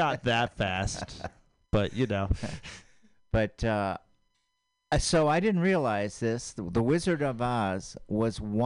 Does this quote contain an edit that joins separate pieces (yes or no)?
no